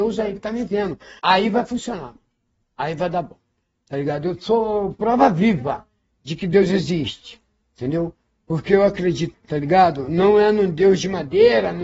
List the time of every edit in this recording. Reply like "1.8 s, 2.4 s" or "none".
1.2 s, 9.3 s